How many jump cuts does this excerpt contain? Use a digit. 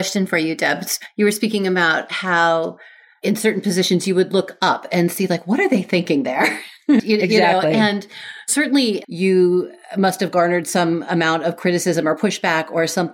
2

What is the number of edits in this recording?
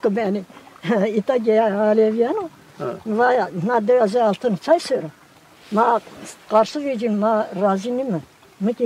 0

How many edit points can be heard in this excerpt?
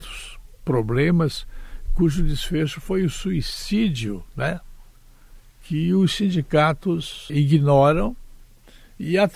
1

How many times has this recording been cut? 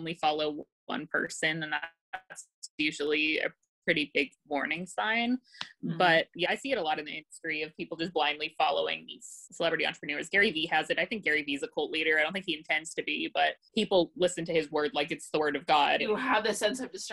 2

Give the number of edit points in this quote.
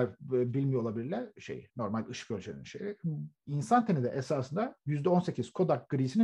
2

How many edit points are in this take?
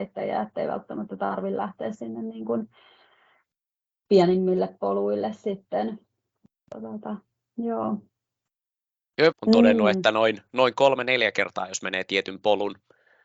1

